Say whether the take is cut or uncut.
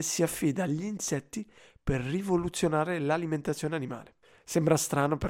uncut